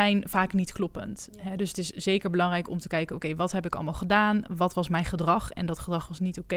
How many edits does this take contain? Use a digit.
0